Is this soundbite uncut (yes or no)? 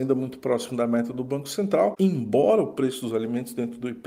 no